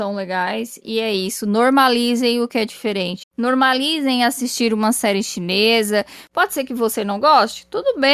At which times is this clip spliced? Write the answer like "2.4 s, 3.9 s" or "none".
3.2 s